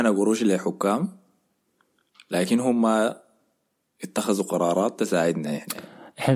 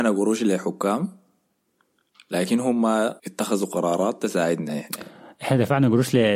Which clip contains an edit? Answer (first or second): second